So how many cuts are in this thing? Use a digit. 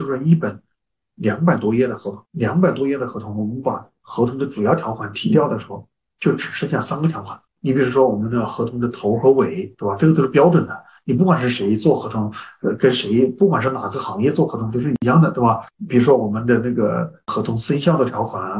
0